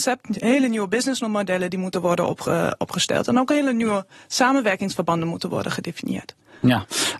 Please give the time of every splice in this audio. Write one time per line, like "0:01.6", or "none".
none